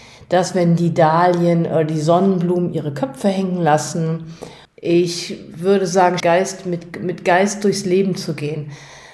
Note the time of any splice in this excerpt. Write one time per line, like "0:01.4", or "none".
0:04.6
0:06.2